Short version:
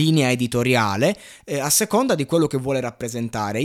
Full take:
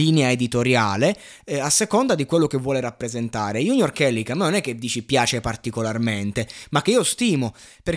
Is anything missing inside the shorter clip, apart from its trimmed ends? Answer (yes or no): no